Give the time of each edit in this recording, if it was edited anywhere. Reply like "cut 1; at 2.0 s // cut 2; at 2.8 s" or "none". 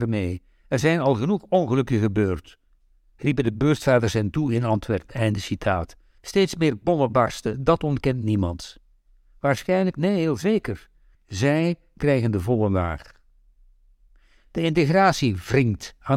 cut 1; at 6.2 s // cut 2; at 11.1 s